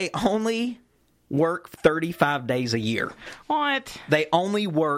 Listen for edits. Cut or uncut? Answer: uncut